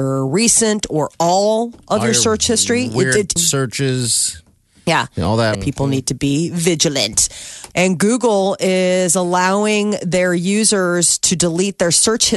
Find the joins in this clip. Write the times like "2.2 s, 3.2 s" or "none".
3.4 s, 5.5 s, 7.7 s